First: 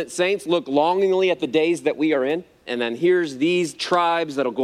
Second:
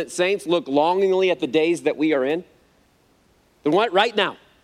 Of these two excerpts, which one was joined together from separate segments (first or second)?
first